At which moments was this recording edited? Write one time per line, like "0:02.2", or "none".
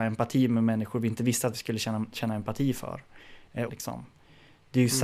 0:03.7